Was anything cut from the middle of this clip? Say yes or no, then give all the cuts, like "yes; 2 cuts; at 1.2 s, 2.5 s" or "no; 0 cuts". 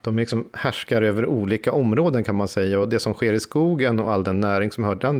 no; 0 cuts